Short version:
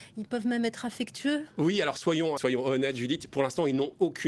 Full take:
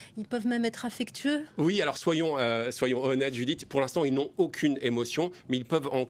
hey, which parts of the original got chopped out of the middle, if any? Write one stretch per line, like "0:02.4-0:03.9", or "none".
0:02.4-0:02.7